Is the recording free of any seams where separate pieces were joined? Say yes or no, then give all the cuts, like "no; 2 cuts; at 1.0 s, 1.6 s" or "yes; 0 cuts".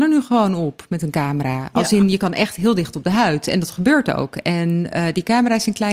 yes; 0 cuts